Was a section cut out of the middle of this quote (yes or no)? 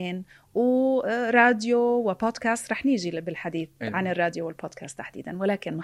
no